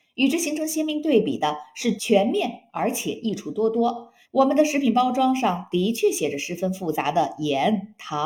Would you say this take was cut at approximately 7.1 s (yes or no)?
no